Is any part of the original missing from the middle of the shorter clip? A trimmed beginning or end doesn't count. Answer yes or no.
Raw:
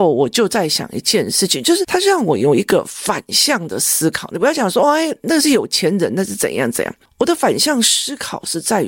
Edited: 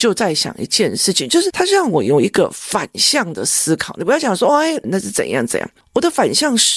yes